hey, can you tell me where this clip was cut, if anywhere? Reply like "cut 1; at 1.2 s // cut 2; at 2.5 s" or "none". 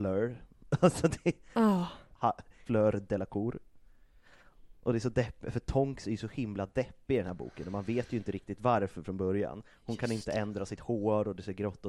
cut 1; at 2.7 s